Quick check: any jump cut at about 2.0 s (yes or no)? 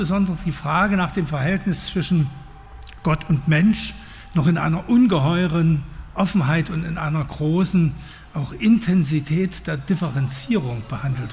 no